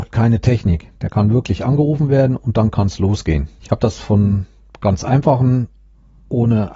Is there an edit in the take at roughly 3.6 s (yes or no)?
yes